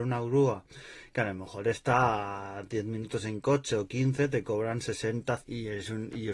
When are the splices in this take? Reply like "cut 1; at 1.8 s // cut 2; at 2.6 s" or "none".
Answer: cut 1; at 5.4 s